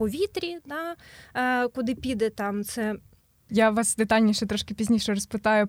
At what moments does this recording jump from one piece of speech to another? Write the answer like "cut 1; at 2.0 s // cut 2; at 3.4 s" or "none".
cut 1; at 3.5 s